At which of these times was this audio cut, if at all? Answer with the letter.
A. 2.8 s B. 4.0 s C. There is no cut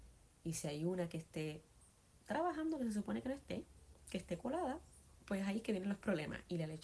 C